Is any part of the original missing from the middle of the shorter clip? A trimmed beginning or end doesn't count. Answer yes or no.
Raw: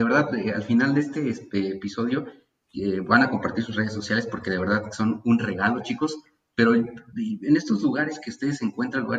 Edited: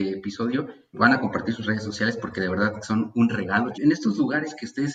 yes